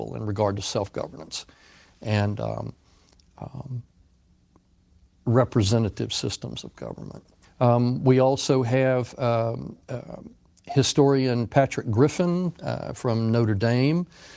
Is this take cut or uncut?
cut